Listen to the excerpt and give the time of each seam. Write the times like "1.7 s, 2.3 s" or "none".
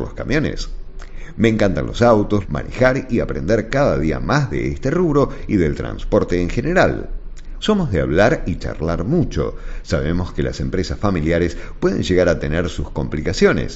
2.4 s, 7.6 s